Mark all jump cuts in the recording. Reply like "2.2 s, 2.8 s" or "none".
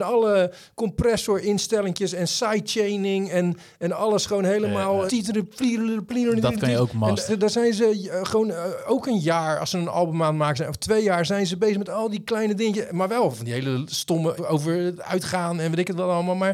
5.1 s, 7.3 s, 14.4 s